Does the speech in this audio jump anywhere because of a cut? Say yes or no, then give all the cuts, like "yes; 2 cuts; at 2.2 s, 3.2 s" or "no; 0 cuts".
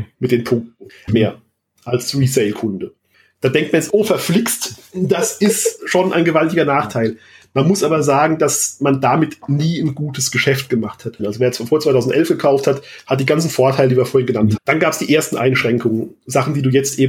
yes; 3 cuts; at 1.1 s, 11.2 s, 14.6 s